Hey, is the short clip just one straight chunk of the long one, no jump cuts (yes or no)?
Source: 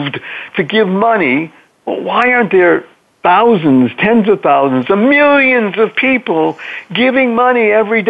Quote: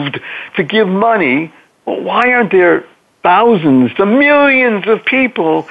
no